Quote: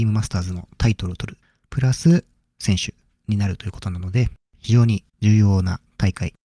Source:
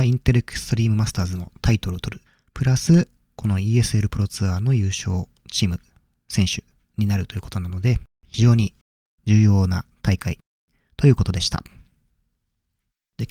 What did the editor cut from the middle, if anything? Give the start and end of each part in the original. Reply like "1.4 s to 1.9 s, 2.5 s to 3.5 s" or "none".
3.2 s to 6.1 s, 8.8 s to 9.1 s